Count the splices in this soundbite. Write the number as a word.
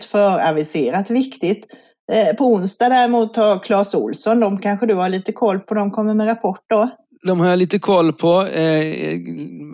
zero